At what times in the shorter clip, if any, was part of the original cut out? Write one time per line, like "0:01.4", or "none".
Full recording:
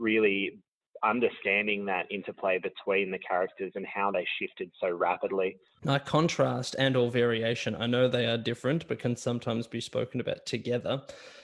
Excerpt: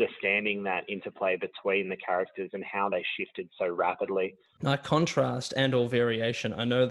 none

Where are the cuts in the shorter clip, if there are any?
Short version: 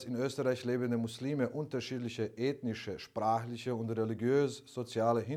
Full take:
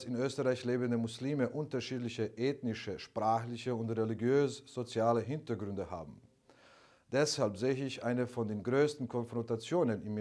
none

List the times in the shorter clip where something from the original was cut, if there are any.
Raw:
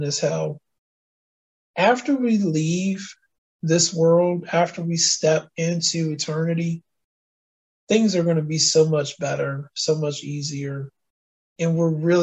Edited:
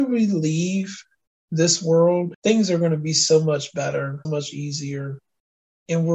0:02.3
0:04.2

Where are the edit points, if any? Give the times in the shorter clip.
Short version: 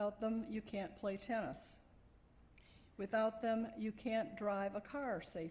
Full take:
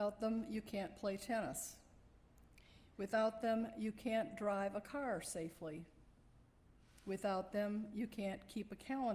none

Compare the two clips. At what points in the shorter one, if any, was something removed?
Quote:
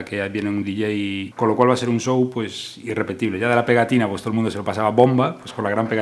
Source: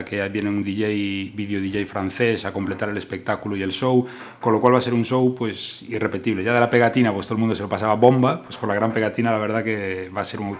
0:01.3

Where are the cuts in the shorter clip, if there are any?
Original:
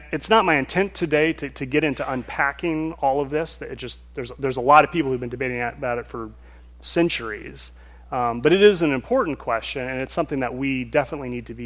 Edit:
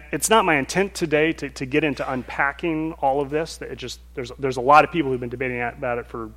none

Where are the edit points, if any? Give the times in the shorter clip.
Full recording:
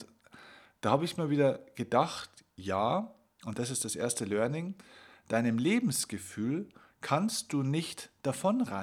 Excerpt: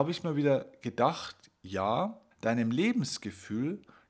0:02.3

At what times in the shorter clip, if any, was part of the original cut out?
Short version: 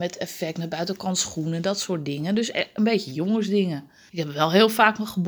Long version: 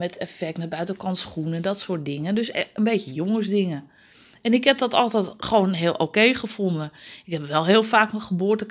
0:04.1

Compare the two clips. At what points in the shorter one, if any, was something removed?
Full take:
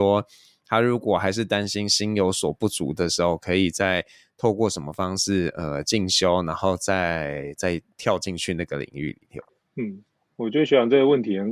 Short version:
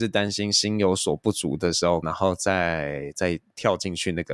0:02.0

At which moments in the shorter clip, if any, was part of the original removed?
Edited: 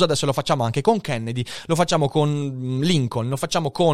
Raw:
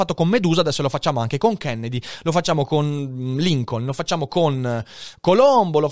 none

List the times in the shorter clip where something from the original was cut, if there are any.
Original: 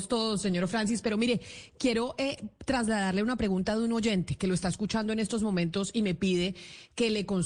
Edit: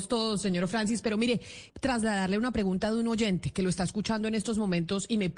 0:01.7

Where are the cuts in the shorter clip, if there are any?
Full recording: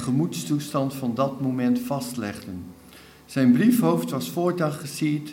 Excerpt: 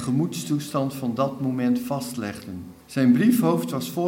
0:02.8

